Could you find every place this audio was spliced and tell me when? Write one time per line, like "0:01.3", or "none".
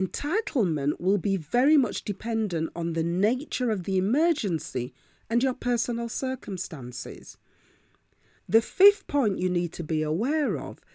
0:08.4